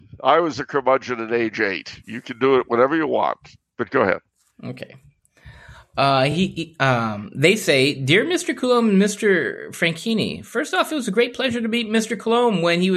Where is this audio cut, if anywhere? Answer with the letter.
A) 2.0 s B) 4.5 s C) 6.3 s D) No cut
D